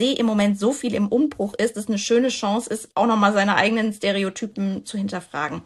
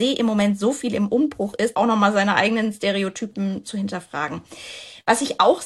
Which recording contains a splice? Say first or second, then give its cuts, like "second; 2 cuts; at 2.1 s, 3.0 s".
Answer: second; 1 cut; at 1.7 s